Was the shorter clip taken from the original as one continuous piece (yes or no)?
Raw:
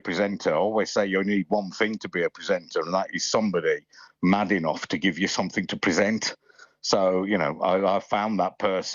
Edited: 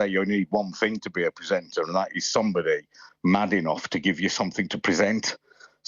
yes